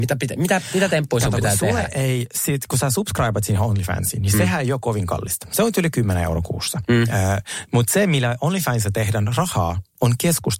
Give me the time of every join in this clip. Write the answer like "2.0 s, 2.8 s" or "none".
none